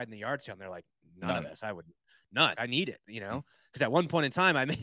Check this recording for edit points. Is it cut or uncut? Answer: cut